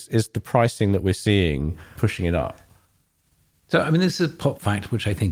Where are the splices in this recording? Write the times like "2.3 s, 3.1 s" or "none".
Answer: 2.0 s